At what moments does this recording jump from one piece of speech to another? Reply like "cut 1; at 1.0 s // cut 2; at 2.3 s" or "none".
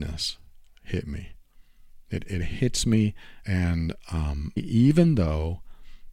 cut 1; at 3.4 s // cut 2; at 4.6 s